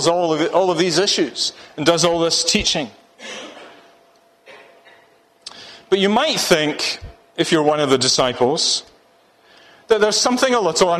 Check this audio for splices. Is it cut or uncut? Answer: uncut